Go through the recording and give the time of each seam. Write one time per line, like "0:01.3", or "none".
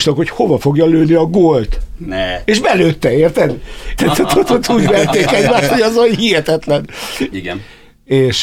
0:04.0
0:07.3